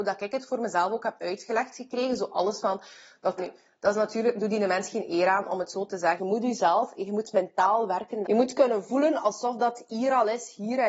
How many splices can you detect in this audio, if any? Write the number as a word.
three